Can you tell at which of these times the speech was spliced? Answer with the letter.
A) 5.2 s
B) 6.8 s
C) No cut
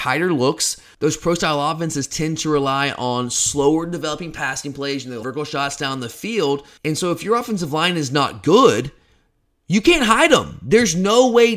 A